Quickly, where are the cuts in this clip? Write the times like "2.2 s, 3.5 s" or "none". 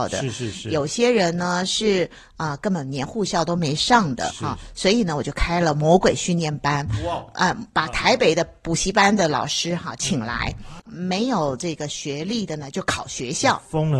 4.3 s, 10.8 s